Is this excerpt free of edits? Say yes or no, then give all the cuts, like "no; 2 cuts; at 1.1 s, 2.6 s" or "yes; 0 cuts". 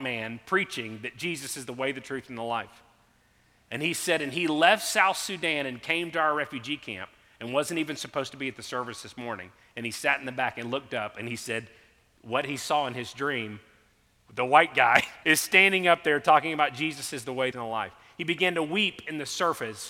no; 2 cuts; at 15.2 s, 17.5 s